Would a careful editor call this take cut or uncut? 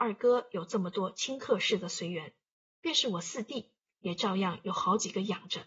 uncut